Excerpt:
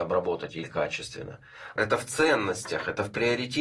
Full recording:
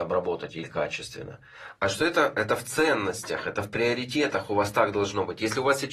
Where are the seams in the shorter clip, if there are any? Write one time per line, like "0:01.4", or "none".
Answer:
0:01.8